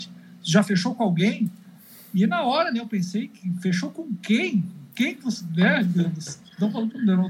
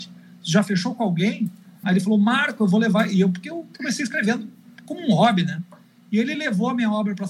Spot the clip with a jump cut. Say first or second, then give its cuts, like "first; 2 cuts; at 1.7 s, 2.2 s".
second; 1 cut; at 1.8 s